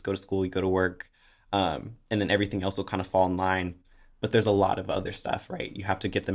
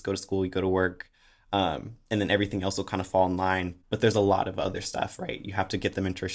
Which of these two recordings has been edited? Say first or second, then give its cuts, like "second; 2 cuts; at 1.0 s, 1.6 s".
second; 1 cut; at 3.8 s